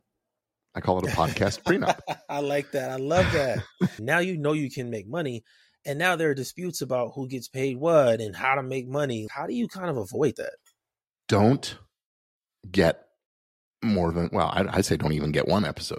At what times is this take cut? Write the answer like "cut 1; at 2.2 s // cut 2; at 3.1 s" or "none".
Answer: cut 1; at 4.0 s // cut 2; at 9.3 s